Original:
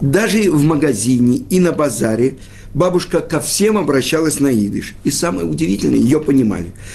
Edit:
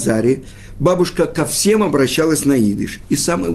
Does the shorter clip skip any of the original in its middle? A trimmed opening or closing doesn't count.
no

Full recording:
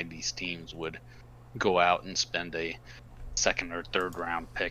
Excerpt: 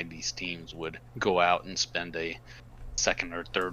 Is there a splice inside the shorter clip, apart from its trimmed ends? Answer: yes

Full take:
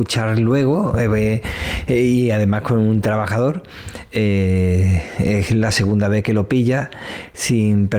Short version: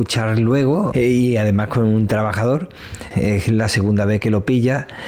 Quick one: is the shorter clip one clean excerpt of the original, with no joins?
no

